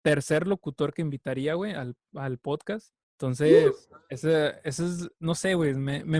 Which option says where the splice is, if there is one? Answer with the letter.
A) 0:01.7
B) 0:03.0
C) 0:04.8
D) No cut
B